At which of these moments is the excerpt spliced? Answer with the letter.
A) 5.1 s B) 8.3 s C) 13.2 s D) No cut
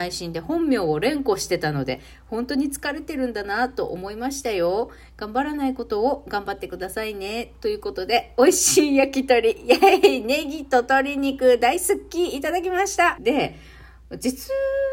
C